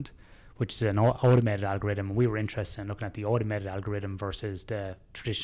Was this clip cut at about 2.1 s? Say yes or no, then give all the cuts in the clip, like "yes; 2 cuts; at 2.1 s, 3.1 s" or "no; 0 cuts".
no; 0 cuts